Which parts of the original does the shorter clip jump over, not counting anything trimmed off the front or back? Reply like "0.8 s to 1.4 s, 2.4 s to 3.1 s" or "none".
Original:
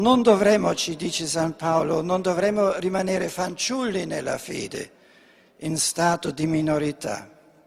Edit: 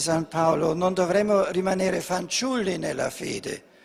none